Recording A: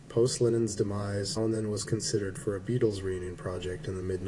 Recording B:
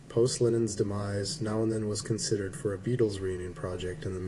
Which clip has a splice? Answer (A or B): A